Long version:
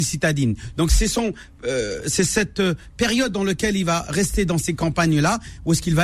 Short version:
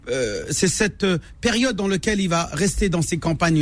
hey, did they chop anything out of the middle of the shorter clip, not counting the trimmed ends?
no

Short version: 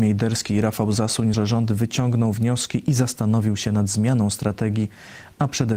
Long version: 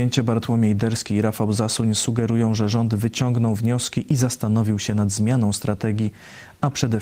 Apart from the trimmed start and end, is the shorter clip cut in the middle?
yes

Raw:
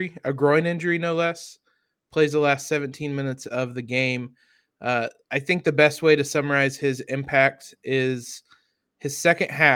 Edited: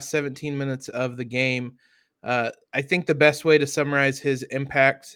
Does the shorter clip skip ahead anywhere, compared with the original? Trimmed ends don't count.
no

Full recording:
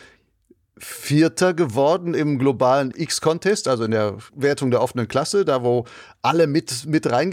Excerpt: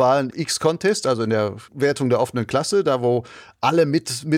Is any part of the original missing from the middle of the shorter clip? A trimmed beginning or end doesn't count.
no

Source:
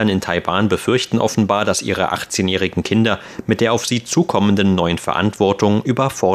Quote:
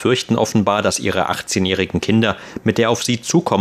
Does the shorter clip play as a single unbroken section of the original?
yes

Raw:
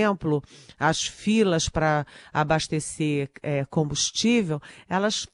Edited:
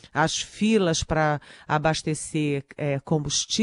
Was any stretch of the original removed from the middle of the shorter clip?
no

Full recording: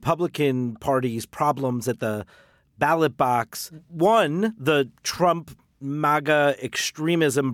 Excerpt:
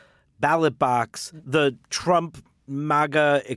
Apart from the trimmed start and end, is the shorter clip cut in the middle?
yes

